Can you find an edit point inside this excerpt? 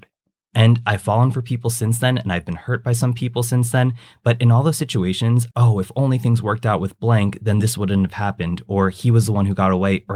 yes; 1 cut; at 5.5 s

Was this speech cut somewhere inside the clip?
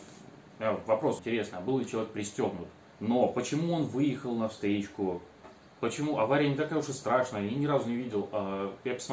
yes; 2 cuts; at 1.2 s, 2.9 s

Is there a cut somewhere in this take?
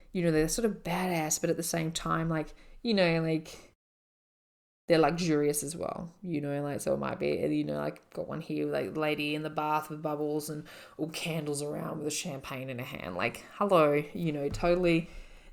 no; 0 cuts

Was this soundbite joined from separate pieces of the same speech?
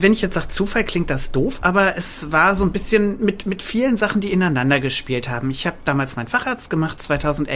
no; 0 cuts

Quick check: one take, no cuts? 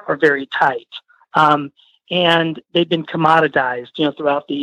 yes; 0 cuts

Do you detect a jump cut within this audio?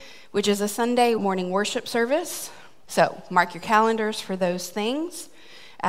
yes; 2 cuts; at 1.2 s, 2.8 s

